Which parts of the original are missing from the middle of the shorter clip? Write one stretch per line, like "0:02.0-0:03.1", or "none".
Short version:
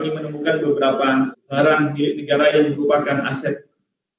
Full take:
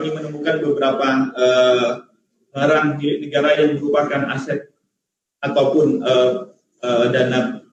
0:01.3-0:02.4